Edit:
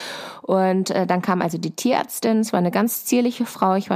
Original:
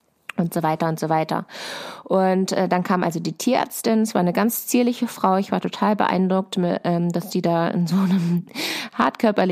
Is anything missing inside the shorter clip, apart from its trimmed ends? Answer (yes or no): no